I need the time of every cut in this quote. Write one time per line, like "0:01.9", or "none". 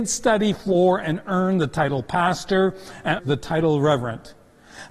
0:03.2